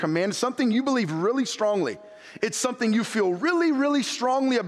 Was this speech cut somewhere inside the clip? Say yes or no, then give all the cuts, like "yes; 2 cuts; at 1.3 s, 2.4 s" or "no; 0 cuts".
yes; 1 cut; at 2.4 s